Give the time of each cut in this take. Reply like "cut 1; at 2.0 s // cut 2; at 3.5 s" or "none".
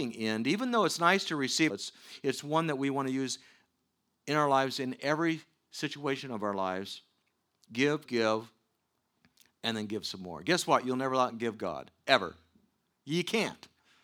cut 1; at 1.7 s // cut 2; at 8.1 s